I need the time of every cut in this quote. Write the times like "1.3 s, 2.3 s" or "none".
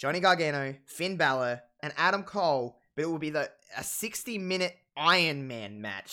1.8 s